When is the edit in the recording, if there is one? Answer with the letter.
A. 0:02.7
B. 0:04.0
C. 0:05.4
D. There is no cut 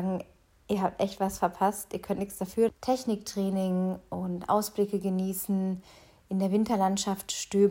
A